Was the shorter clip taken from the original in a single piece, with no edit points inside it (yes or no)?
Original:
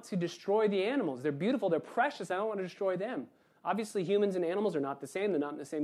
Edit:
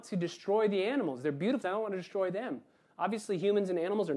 no